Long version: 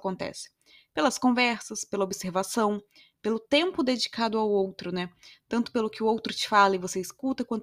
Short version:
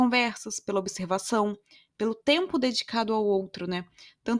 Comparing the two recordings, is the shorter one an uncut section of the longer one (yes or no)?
yes